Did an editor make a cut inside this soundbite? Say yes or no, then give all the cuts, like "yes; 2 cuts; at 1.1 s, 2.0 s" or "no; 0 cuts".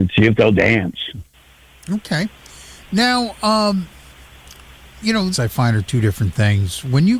yes; 1 cut; at 5.3 s